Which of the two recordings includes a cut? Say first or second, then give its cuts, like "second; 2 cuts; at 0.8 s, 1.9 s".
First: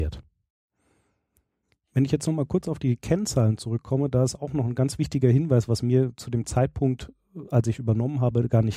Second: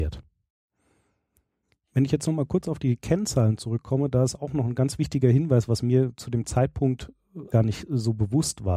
second; 1 cut; at 7.5 s